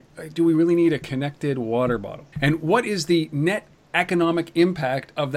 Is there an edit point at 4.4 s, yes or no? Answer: no